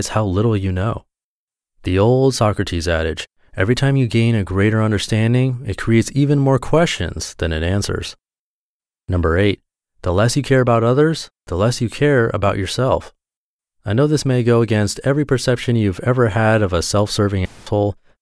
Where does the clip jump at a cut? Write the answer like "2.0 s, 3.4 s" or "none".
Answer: none